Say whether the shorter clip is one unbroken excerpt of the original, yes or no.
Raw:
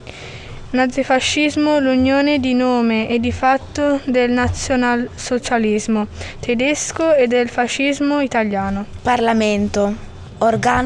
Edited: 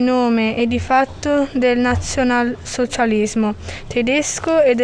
yes